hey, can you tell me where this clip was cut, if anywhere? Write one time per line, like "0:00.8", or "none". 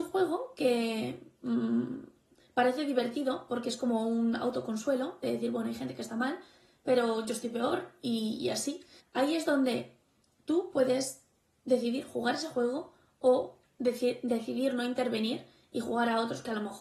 0:09.0